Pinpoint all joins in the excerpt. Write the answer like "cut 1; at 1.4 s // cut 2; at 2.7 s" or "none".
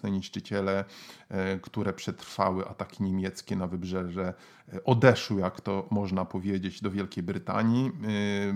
none